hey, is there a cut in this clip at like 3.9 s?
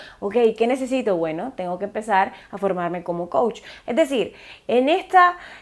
yes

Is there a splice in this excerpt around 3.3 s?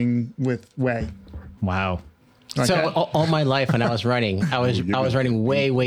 no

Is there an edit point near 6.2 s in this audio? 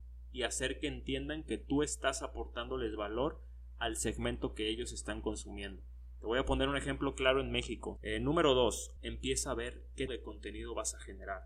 no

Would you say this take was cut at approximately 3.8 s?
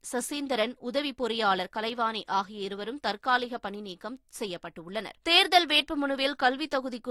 no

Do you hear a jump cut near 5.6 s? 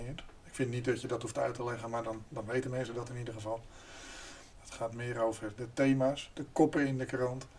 yes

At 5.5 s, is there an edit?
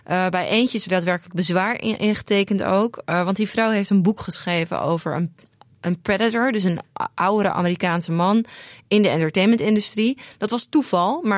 no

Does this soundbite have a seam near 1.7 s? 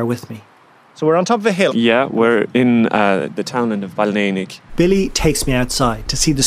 yes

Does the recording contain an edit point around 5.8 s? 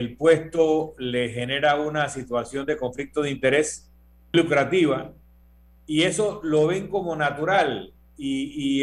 no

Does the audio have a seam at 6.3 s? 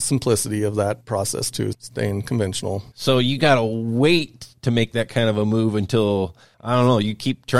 no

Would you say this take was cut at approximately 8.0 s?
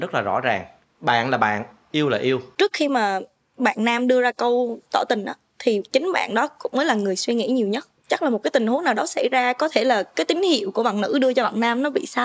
yes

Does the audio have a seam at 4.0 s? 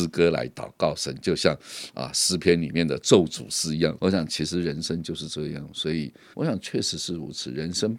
yes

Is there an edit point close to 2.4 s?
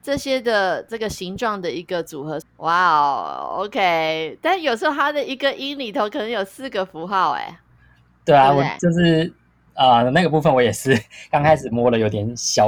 yes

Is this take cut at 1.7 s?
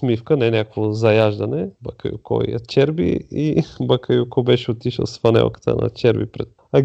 yes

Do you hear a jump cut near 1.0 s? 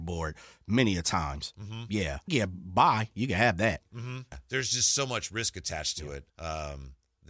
no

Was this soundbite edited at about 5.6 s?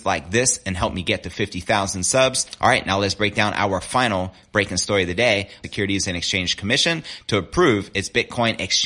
yes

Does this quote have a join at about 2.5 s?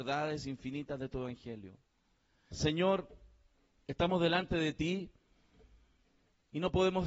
yes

